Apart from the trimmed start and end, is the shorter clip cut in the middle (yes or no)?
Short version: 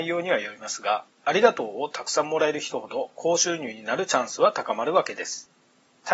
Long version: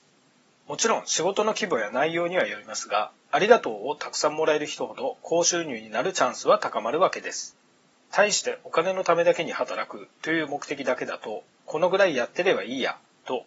no